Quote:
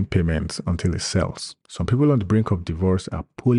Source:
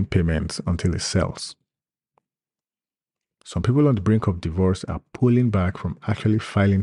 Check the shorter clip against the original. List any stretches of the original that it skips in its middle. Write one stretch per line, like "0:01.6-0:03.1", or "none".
0:01.6-0:03.3

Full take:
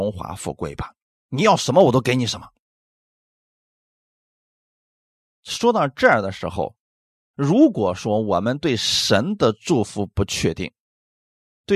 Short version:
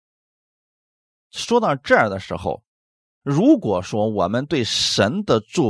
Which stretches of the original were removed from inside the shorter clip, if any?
none

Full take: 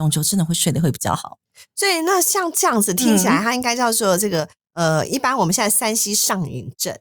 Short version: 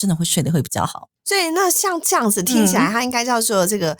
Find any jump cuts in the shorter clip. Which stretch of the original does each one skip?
0:01.5-0:01.7

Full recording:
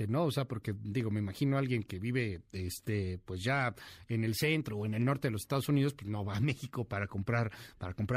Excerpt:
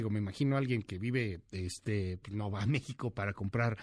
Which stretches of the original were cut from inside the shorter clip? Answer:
0:03.2-0:06.0

